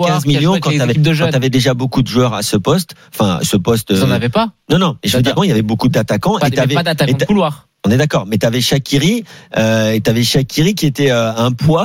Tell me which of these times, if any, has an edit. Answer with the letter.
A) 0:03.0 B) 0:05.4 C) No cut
B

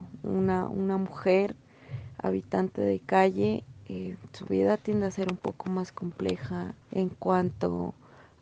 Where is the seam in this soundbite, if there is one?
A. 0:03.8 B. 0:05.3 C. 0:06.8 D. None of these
C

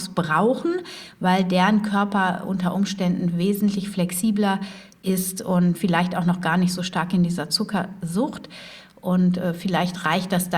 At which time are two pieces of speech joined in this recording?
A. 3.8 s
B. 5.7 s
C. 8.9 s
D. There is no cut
B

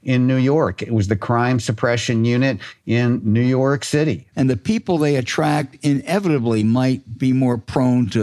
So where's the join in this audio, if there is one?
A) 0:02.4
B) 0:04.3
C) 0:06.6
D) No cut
B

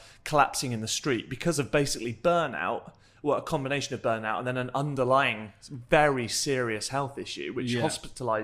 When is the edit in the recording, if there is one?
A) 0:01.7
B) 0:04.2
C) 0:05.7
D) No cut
D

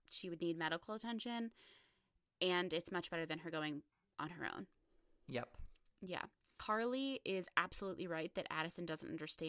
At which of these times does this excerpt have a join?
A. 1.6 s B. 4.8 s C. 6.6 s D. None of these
D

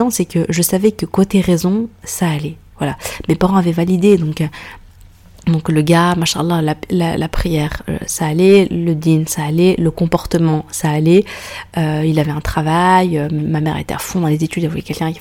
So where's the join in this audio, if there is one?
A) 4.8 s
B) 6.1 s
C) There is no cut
C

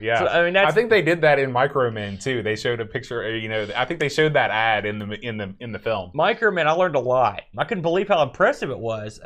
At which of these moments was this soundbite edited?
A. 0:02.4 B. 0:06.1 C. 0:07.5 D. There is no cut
C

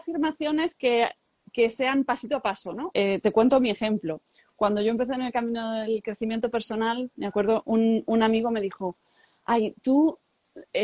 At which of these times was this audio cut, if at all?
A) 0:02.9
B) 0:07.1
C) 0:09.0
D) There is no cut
A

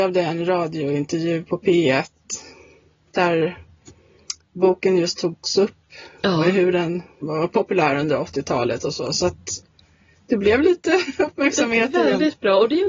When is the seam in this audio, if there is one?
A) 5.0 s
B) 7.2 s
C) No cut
B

